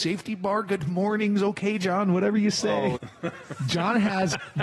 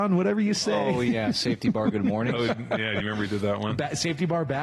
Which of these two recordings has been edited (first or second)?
first